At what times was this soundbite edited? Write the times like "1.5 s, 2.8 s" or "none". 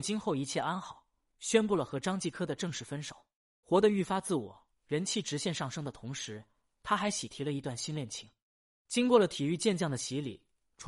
3.6 s, 4.8 s, 8.7 s